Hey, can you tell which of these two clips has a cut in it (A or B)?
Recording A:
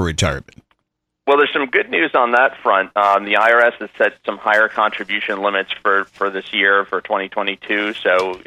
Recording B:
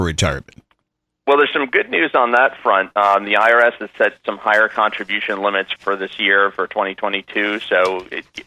B